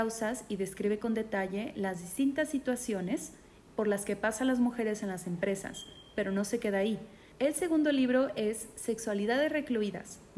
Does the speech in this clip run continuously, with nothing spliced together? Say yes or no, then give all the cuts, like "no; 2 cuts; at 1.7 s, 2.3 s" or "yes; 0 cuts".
no; 1 cut; at 7.3 s